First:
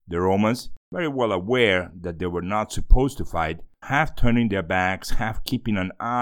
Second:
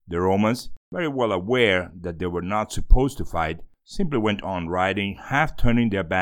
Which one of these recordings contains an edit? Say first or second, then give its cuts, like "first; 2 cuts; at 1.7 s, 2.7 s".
first; 1 cut; at 3.8 s